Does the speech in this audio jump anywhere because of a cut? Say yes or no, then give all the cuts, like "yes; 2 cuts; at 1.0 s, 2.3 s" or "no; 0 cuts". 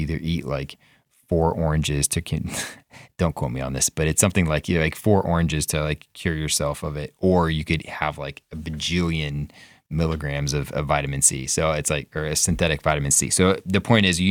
no; 0 cuts